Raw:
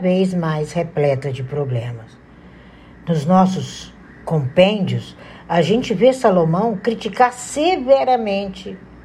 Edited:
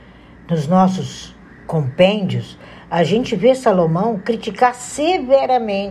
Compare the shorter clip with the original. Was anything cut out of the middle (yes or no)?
no